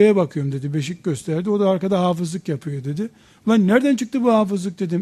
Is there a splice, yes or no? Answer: no